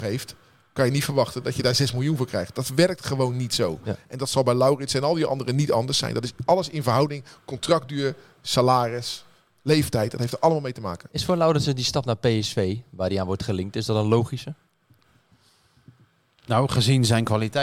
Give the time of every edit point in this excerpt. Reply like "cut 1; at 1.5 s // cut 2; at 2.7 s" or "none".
none